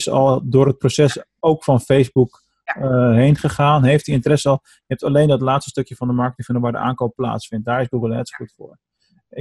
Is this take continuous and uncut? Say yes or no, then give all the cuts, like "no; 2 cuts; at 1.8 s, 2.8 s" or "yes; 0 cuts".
yes; 0 cuts